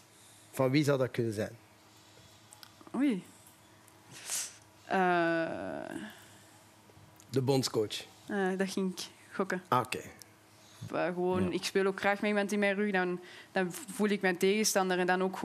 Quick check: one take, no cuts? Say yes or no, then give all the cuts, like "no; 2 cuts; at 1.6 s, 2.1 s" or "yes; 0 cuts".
no; 1 cut; at 10.9 s